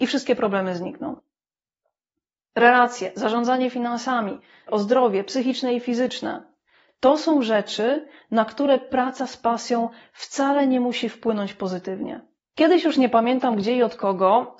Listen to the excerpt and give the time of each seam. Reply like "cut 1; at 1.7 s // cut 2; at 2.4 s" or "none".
cut 1; at 4.7 s // cut 2; at 12.4 s